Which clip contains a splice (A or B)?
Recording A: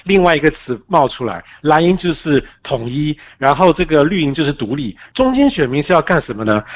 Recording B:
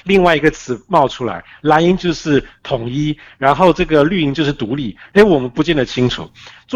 B